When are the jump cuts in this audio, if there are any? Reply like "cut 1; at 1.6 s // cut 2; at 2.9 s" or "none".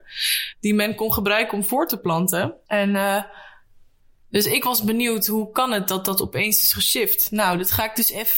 cut 1; at 2.7 s